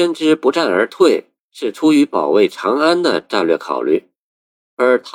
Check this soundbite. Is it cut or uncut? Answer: cut